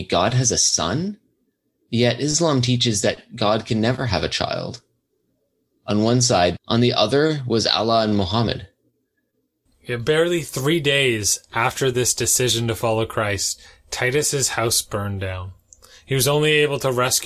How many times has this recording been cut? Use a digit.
2